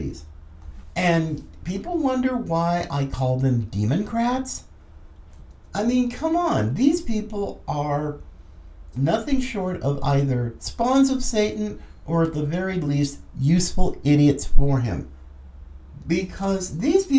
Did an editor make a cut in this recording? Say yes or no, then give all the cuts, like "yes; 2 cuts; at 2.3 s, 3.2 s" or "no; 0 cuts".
yes; 1 cut; at 8.9 s